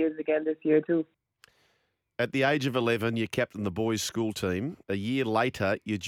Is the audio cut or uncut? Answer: cut